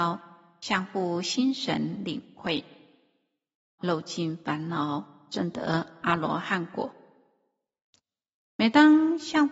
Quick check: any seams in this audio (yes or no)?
yes